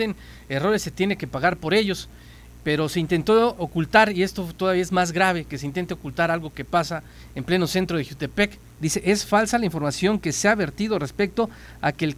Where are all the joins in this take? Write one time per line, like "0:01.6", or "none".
0:03.6
0:08.6